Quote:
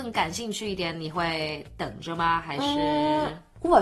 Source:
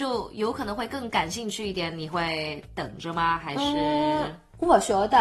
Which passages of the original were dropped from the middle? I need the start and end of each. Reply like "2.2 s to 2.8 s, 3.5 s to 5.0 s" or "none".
none

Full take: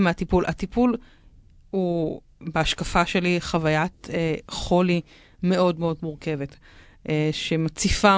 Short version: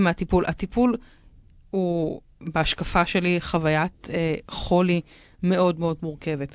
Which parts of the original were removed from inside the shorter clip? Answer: none

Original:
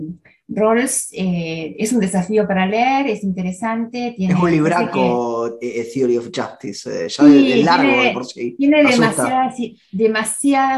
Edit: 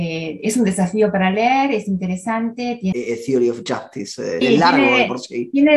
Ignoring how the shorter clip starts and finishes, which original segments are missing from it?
4.3 s to 5.6 s, 7.1 s to 7.5 s

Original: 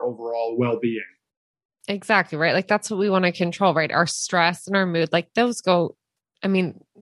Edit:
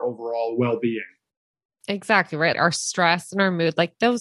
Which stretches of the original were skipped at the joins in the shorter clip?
2.5 s to 3.9 s

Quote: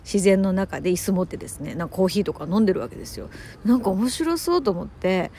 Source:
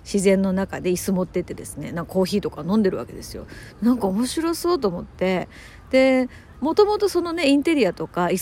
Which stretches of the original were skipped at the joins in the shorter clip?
1.3 s to 1.4 s

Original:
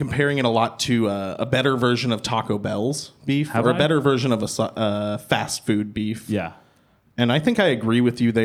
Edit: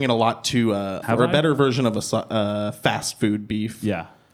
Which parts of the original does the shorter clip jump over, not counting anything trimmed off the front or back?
1.4 s to 3.5 s

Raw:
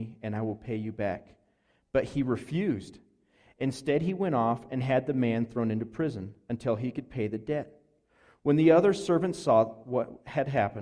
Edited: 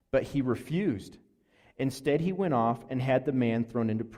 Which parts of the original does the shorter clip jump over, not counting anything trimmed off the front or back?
none

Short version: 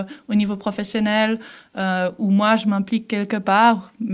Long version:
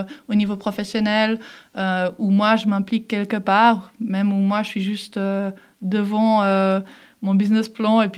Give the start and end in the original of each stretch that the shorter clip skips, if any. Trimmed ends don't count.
none

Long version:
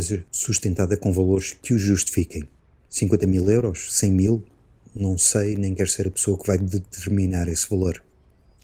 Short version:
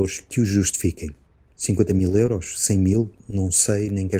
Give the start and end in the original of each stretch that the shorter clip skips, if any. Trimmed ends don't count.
4.5 s to 4.9 s

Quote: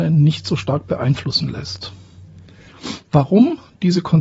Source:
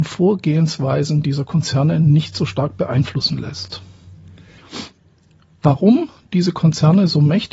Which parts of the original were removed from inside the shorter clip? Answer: 4.9 s to 5.6 s

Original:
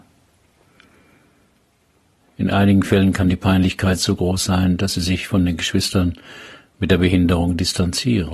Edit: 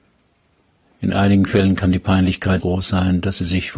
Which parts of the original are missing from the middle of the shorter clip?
4.0 s to 4.2 s

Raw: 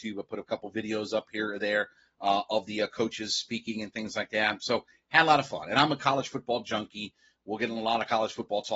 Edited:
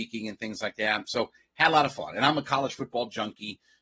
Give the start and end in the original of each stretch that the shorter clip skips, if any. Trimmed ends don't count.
none

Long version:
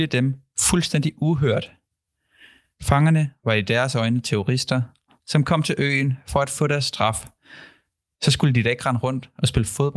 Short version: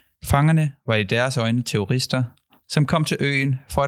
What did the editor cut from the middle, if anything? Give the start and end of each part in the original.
none

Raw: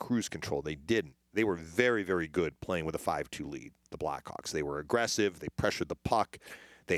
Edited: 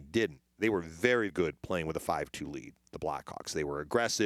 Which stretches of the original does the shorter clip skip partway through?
2.0 s to 2.3 s

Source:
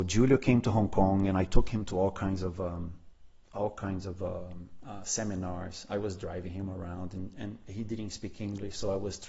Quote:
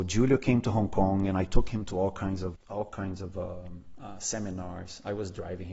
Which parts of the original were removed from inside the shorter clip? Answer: 2.5 s to 3.4 s

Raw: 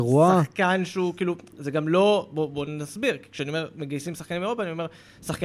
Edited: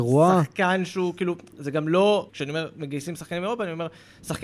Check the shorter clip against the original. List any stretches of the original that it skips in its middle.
2.3 s to 3.3 s

